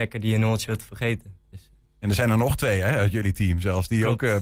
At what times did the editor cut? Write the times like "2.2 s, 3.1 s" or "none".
none

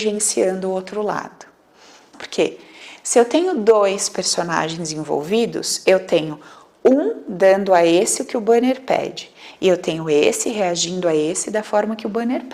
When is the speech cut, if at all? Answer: 2.1 s

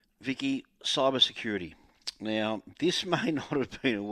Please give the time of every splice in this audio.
none

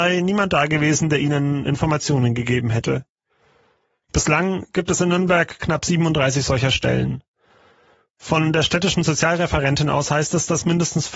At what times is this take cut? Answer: 4.0 s

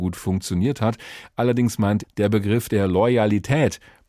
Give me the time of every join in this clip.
2.0 s

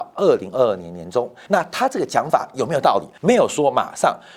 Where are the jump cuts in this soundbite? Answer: 1.5 s, 3.2 s

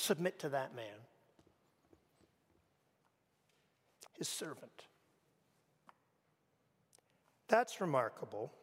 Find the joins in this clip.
4.1 s

